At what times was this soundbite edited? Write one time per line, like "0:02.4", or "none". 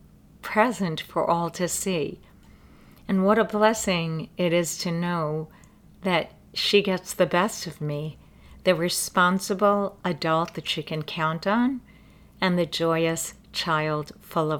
none